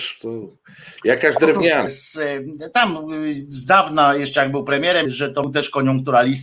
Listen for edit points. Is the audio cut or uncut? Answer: cut